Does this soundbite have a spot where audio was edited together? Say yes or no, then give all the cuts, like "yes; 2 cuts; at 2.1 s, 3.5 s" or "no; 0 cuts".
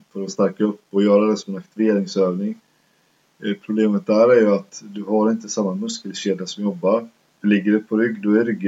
no; 0 cuts